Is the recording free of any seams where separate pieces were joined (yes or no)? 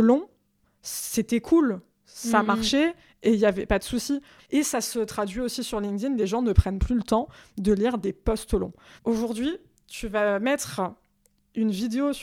no